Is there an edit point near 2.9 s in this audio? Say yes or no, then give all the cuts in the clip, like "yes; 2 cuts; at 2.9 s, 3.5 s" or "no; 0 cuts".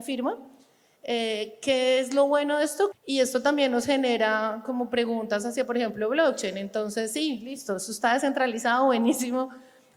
yes; 1 cut; at 2.9 s